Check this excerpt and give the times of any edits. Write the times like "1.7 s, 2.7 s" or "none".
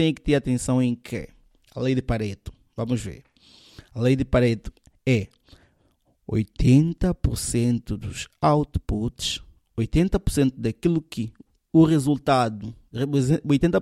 none